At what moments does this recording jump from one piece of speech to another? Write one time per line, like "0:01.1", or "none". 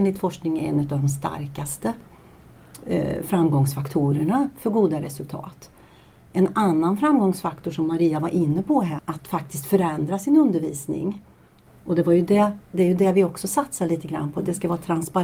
0:09.0
0:11.7

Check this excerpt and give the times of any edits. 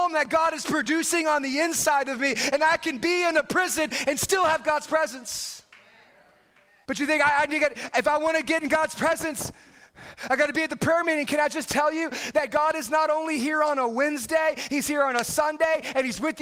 0:06.9

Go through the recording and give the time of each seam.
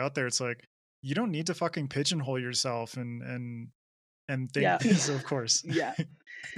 0:04.8

